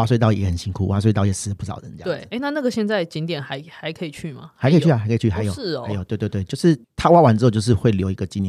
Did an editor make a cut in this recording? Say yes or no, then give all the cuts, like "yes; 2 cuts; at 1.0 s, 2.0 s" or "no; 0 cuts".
yes; 1 cut; at 6.8 s